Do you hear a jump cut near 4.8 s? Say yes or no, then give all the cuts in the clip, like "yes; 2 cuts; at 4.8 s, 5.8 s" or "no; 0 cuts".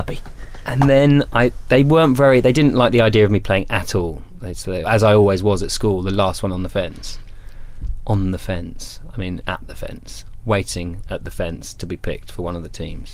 yes; 1 cut; at 4.8 s